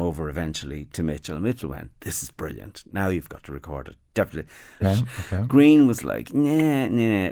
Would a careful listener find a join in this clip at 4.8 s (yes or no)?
yes